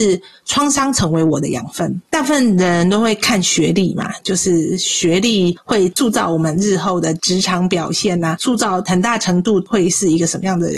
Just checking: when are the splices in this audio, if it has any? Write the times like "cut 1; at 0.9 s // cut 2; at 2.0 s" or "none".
cut 1; at 2.1 s